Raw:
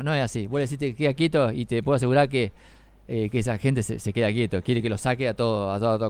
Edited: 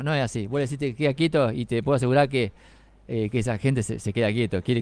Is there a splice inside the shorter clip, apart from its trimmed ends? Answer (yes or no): no